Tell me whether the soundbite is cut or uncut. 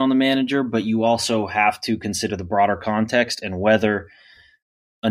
uncut